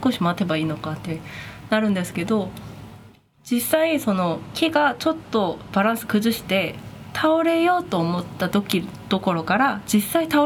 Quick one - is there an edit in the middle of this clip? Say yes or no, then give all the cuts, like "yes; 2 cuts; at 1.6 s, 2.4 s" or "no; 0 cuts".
no; 0 cuts